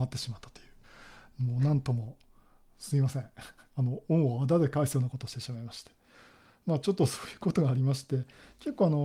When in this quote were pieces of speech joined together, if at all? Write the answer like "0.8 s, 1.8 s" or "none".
none